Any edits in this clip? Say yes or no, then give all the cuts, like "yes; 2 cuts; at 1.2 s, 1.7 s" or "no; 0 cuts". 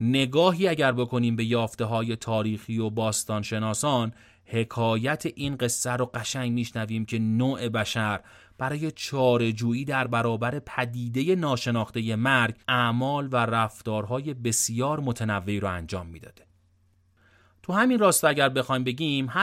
yes; 1 cut; at 12.6 s